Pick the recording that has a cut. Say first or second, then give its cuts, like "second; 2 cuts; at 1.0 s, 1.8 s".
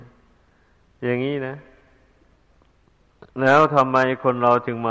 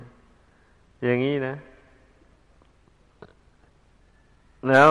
first; 1 cut; at 3.3 s